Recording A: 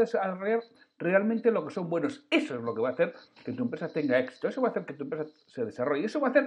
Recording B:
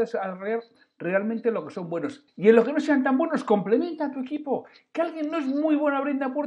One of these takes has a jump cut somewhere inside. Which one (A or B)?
B